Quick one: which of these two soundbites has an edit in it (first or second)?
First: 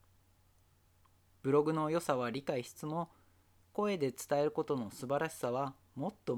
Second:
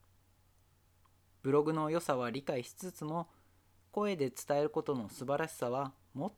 first